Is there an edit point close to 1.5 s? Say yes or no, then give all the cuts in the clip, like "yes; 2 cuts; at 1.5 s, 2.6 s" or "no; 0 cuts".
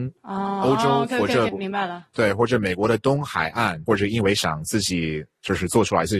yes; 2 cuts; at 1.5 s, 3.9 s